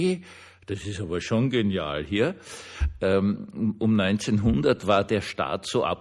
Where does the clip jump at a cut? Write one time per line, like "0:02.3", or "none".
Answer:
none